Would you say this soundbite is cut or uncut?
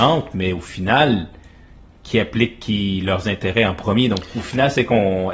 uncut